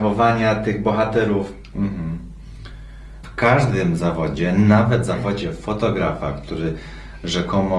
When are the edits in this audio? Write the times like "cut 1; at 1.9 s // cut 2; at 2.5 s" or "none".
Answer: cut 1; at 1.7 s // cut 2; at 3.2 s